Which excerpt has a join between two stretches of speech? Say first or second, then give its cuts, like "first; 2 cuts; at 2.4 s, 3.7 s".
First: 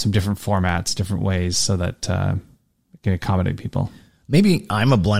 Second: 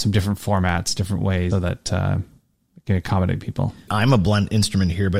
second; 2 cuts; at 1.5 s, 3.9 s